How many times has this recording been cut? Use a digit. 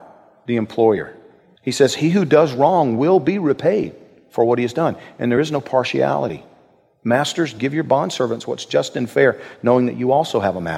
1